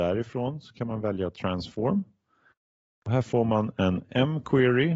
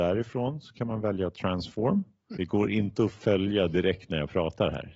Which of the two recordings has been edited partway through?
second; 1 cut; at 2.3 s

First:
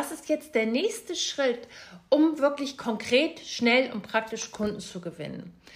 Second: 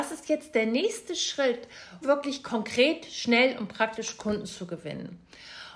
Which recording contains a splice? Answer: second; 1 cut; at 2.0 s

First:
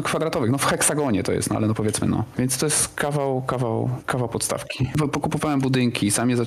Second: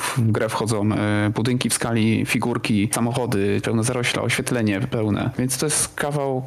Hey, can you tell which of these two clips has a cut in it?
second; 2 cuts; at 3.6 s, 5.3 s

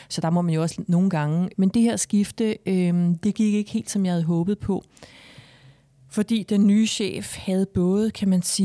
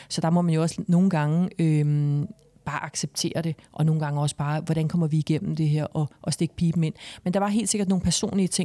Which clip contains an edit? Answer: first; 1 cut; at 1.5 s

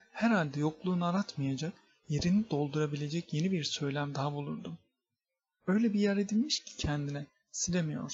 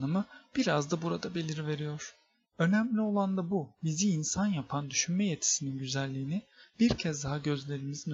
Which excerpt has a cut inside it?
second; 2 cuts; at 2.4 s, 3.7 s

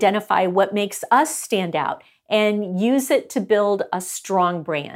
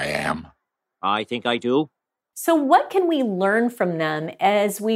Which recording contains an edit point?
second; 1 cut; at 2.3 s

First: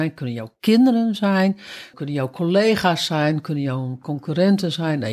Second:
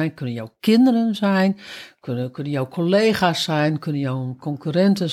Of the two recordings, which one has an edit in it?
first; 1 cut; at 1.9 s

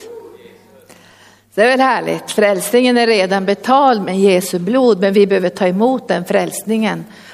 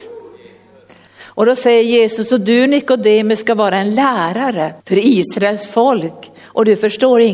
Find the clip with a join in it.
second; 2 cuts; at 1.1 s, 4.8 s

